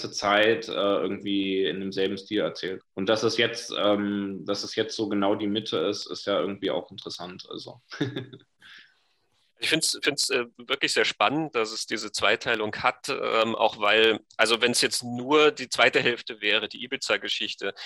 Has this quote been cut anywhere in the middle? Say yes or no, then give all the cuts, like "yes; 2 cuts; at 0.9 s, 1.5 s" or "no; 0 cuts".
yes; 1 cut; at 2.8 s